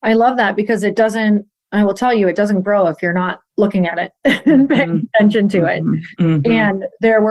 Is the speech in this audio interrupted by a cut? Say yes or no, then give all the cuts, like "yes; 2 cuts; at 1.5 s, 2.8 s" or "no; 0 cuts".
yes; 1 cut; at 3.5 s